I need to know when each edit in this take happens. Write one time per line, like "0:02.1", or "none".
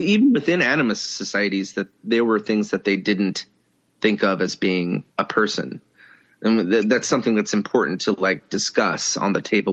0:05.1

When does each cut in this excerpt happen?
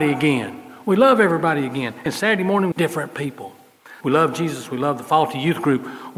0:02.7
0:04.0

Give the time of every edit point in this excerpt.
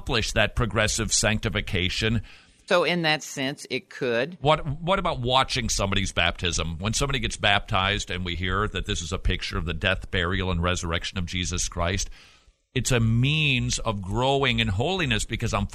0:02.7

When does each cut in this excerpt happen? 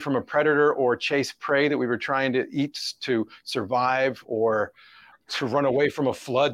0:05.1

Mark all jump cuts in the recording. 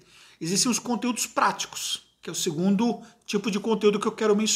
none

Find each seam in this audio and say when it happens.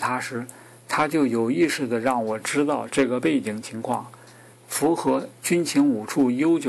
0:04.5

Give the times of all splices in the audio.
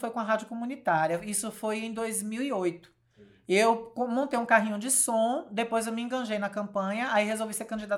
none

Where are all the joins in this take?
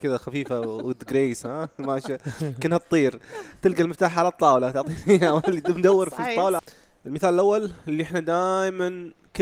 0:06.6

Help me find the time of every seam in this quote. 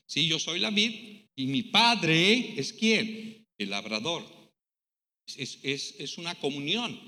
0:03.5

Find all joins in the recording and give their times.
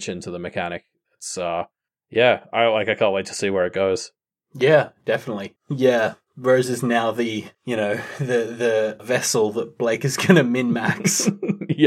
0:05.6
0:07.5
0:09.0

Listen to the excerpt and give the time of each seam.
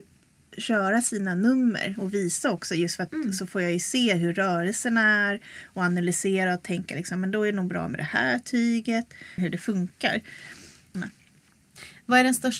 0:09.4
0:10.9

